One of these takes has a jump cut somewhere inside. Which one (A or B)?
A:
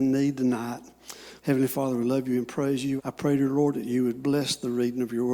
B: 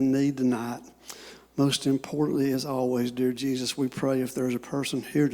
A